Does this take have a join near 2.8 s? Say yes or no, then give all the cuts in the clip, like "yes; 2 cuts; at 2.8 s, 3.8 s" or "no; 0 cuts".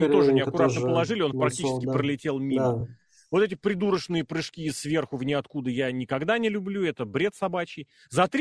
no; 0 cuts